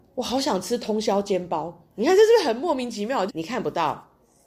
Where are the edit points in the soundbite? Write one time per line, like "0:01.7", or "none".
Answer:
0:03.3